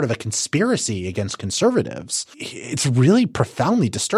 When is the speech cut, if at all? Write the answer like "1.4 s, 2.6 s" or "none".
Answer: 2.3 s